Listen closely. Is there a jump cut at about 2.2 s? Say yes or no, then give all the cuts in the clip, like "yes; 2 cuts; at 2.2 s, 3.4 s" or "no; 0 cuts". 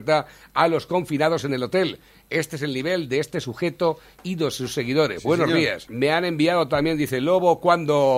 no; 1 cut; at 5.8 s